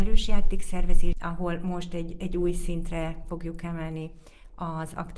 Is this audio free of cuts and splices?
no; 1 cut; at 1.1 s

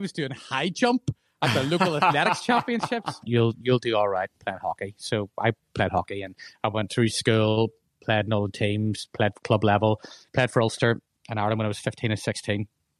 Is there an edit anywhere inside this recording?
yes; 1 cut; at 3.2 s

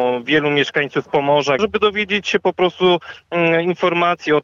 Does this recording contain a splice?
yes; 1 cut; at 1.6 s

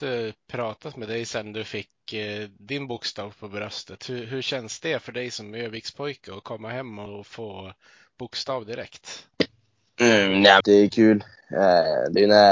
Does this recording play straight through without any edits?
no; 1 cut; at 10.6 s

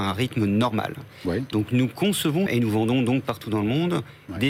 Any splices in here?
yes; 1 cut; at 2.5 s

